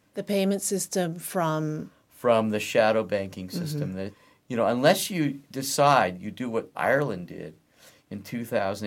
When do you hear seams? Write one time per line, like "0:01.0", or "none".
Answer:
0:06.7